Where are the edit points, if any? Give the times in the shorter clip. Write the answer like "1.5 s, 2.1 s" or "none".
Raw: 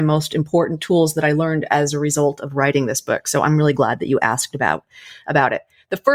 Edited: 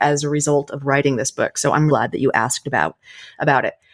1.9 s